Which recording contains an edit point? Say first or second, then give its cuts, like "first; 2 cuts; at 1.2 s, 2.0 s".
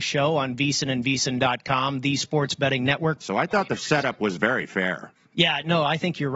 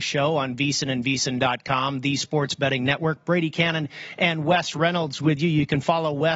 first; 1 cut; at 3.2 s